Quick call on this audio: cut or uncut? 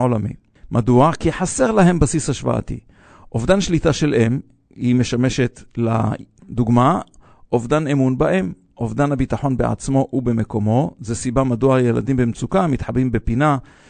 cut